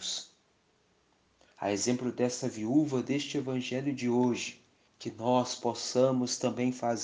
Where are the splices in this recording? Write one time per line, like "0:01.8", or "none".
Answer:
0:04.9